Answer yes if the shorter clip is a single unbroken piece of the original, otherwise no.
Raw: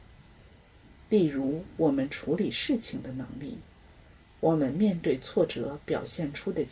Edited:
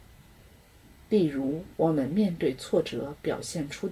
no